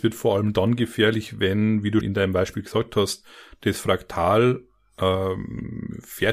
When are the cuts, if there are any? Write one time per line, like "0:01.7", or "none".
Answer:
0:02.0